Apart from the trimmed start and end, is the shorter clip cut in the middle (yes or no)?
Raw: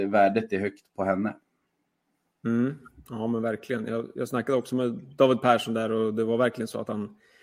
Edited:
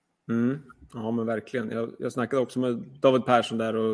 no